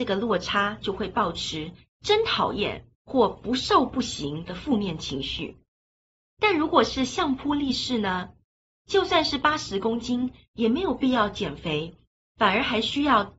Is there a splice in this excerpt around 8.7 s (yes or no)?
no